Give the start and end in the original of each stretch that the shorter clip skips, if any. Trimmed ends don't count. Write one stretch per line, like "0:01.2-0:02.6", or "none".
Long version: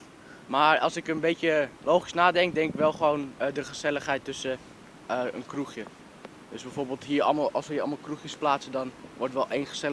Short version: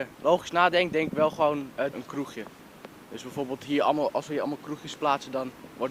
0:03.5-0:05.3